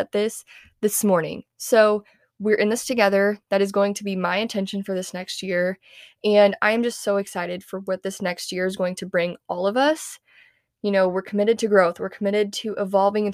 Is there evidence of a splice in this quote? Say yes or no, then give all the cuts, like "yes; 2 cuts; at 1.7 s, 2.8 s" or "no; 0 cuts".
no; 0 cuts